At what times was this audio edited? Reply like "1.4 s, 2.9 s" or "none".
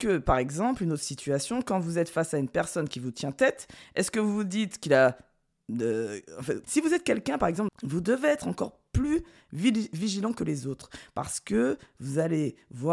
6.6 s, 7.7 s